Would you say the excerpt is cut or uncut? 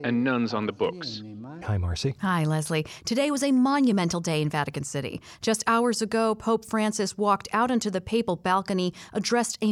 cut